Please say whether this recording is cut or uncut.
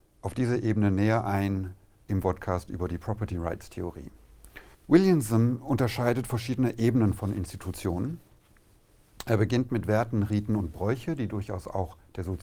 cut